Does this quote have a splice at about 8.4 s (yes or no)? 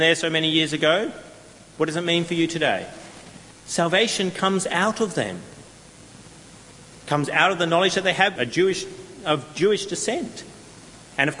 yes